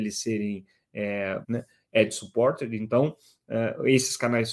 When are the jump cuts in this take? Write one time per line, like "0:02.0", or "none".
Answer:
0:01.4